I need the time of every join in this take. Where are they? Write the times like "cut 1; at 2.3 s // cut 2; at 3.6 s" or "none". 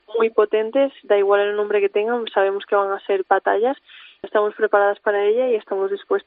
cut 1; at 4.2 s